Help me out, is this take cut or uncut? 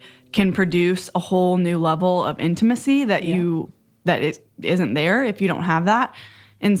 uncut